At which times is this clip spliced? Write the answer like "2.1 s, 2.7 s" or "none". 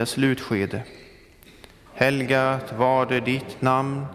1.9 s